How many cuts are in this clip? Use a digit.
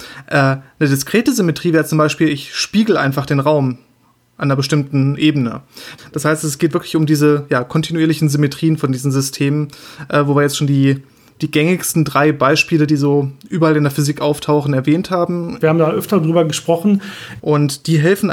3